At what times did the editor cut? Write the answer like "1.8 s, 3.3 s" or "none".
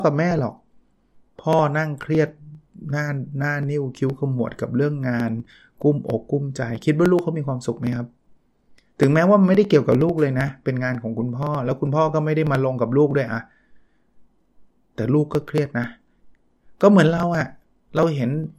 none